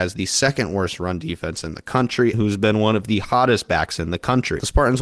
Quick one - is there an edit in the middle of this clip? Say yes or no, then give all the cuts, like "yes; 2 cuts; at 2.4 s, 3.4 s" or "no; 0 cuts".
yes; 1 cut; at 2.3 s